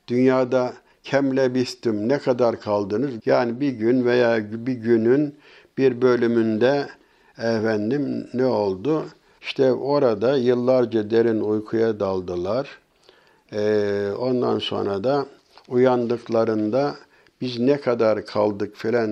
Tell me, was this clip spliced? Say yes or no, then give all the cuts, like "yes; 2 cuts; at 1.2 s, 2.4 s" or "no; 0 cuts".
yes; 2 cuts; at 3.2 s, 9.4 s